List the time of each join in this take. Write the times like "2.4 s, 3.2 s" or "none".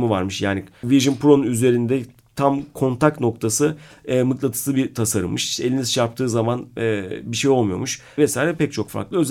8.2 s